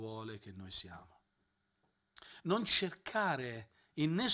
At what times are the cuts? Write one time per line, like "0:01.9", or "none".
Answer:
none